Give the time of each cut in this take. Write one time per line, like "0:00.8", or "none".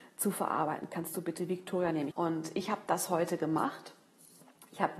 0:02.1

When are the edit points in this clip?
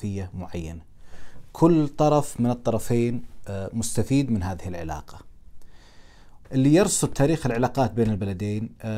0:06.4

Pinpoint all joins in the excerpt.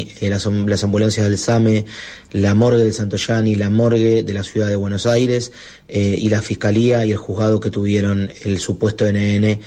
none

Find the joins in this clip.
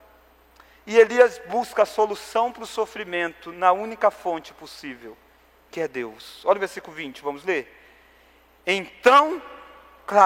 none

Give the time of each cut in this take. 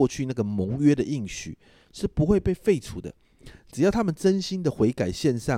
none

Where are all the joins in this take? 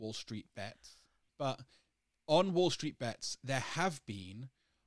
0:01.3

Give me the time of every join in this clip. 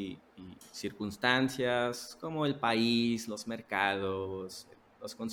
none

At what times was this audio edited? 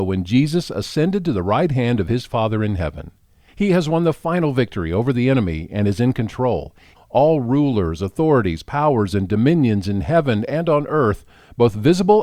0:03.5
0:06.9

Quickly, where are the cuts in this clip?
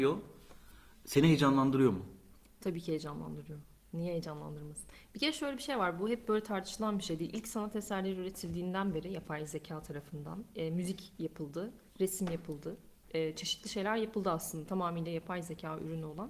none

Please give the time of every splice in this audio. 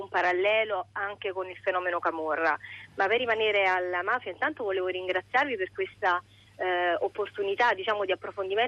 none

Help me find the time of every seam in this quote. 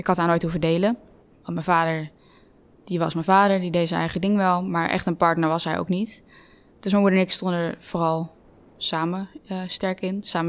none

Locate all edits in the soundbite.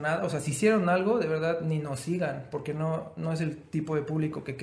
none

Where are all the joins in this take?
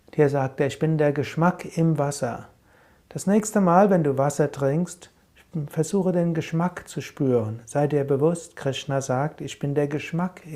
none

